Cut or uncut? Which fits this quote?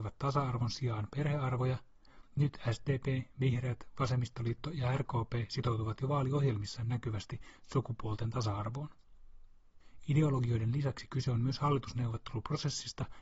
uncut